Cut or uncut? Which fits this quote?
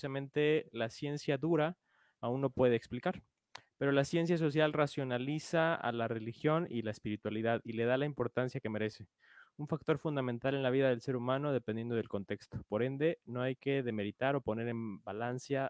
uncut